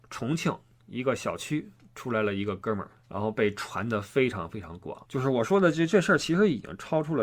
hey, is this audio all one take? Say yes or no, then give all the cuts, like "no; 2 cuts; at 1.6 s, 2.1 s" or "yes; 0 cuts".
no; 2 cuts; at 3.0 s, 5.1 s